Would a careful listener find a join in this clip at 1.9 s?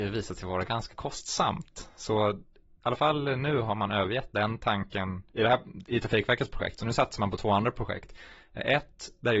no; 0 cuts

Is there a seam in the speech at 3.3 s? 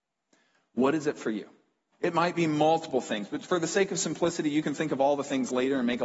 no; 1 cut; at 1.9 s

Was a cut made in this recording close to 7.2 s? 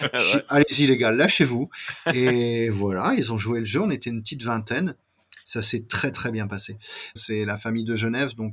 yes; 1 cut; at 7.2 s

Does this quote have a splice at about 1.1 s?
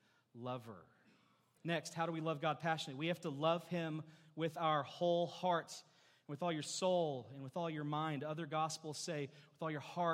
no; 1 cut; at 5.6 s

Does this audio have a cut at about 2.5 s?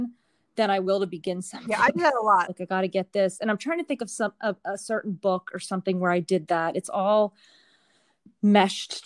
yes; 1 cut; at 2.5 s

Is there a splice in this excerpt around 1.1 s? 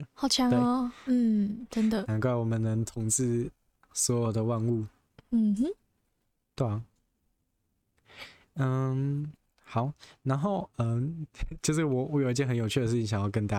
yes; 1 cut; at 1.1 s

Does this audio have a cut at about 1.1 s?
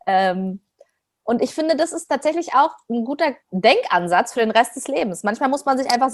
no; 1 cut; at 3.4 s

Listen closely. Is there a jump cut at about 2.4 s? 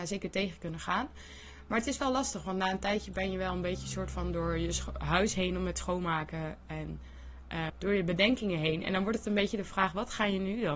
no; 1 cut; at 7.7 s

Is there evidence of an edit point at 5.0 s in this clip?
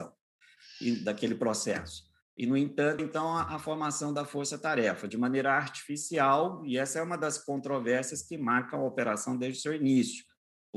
no; 1 cut; at 3.0 s

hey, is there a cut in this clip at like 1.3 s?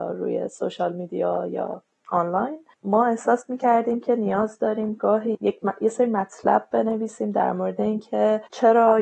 no; 1 cut; at 2.7 s

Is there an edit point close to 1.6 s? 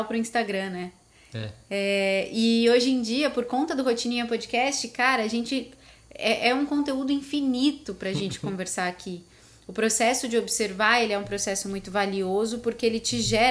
no; 0 cuts

